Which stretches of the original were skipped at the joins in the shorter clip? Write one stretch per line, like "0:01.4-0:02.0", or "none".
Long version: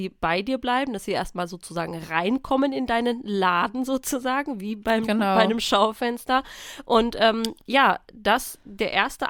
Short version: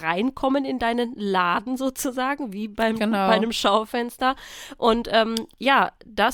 none